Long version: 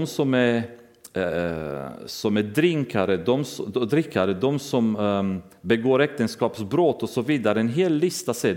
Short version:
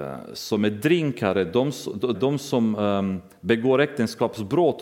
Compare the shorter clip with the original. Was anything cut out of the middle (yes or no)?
yes